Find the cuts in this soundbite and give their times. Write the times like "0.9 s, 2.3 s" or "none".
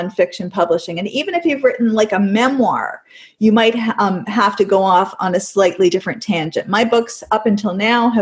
none